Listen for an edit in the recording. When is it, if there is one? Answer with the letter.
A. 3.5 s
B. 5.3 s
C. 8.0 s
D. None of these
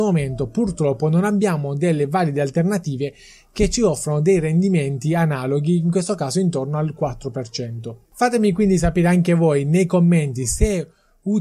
C